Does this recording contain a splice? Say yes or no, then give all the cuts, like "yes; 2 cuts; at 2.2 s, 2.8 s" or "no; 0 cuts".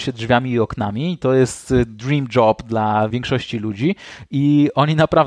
yes; 1 cut; at 3.1 s